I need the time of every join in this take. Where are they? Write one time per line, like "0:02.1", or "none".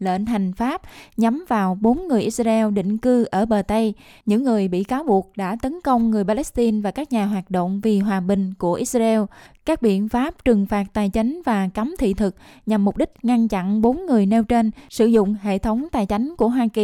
none